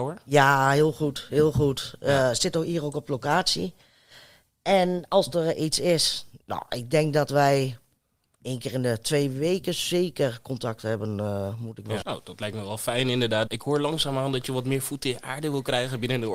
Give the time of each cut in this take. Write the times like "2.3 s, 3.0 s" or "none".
12.0 s, 13.5 s